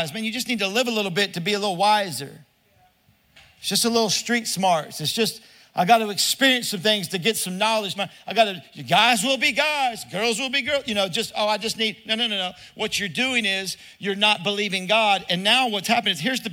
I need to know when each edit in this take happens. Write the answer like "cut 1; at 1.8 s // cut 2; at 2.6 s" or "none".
cut 1; at 8.0 s